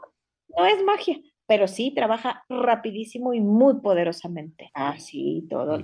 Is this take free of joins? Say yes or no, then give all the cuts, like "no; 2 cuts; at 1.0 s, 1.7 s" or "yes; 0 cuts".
no; 1 cut; at 4.7 s